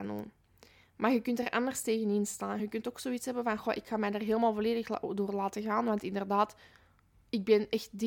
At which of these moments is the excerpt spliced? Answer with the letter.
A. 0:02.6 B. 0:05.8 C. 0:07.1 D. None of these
D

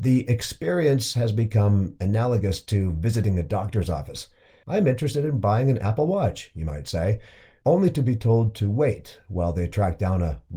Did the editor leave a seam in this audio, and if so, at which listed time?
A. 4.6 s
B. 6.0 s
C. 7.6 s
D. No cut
A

